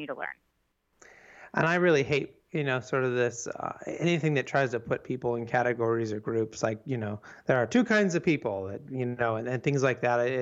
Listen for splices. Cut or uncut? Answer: uncut